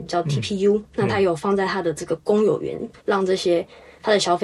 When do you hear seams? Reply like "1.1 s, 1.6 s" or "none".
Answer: 3.0 s